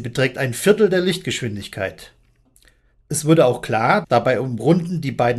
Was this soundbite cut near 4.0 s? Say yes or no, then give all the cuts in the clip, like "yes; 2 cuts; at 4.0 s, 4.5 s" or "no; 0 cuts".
yes; 1 cut; at 4.0 s